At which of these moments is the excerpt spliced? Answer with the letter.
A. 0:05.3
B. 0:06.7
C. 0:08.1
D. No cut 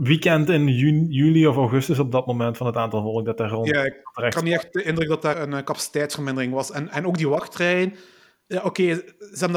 A